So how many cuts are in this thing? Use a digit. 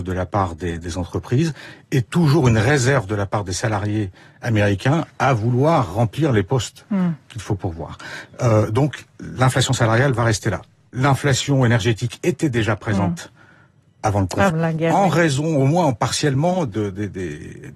2